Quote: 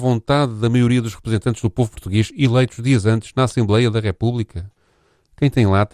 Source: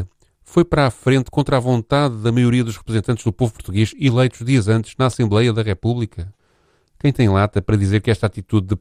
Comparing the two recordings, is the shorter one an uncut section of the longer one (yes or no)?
yes